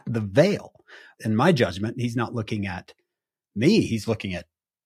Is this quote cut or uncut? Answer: uncut